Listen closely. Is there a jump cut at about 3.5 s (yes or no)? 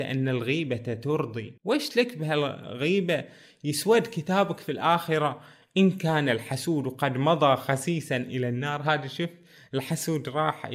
no